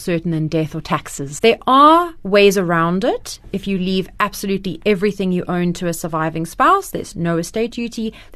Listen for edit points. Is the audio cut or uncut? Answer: cut